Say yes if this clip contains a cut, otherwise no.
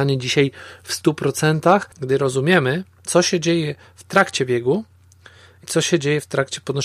yes